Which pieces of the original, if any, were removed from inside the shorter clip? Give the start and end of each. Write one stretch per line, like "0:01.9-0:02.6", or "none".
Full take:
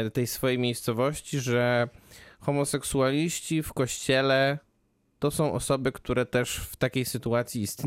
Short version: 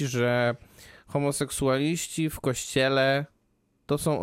none

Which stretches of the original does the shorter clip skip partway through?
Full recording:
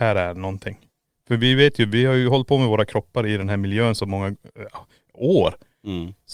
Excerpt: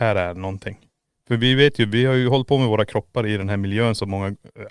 none

